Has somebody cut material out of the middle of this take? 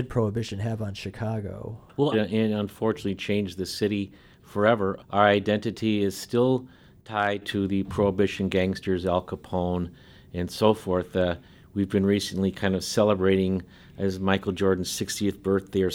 yes; 1 cut; at 2.1 s

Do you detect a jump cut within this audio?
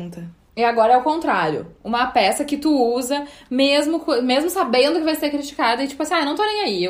no; 0 cuts

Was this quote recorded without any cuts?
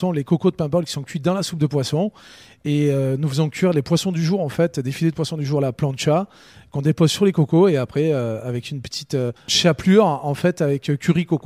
yes; 0 cuts

